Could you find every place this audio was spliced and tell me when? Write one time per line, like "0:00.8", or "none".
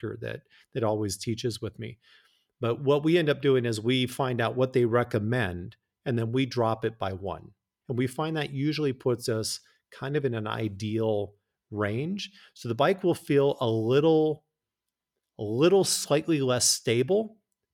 0:07.8

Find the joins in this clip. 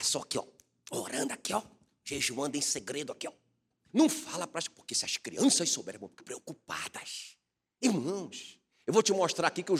0:03.9
0:06.2

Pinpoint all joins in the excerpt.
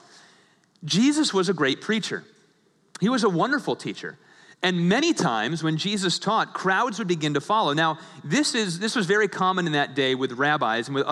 none

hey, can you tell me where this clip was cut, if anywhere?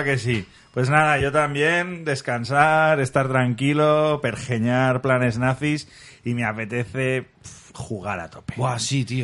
none

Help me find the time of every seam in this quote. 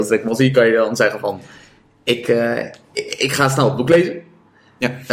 none

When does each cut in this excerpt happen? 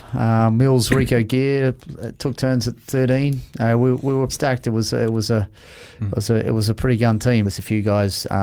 0:04.3
0:07.4

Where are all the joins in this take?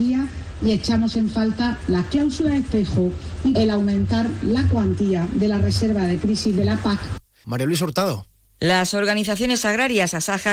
0:03.5
0:07.4

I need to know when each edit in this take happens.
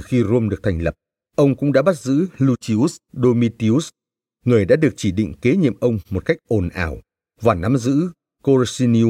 0:01.2

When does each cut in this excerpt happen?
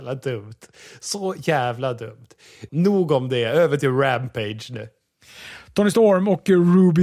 0:02.7

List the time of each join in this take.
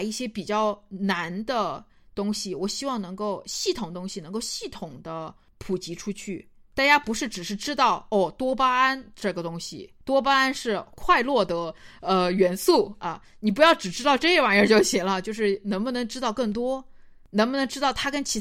0:10.0

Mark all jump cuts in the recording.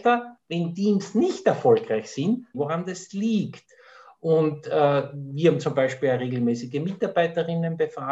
0:02.5

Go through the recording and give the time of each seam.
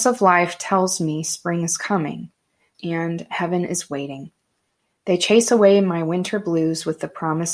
0:02.7

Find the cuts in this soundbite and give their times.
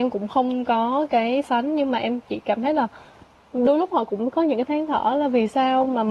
0:01.4

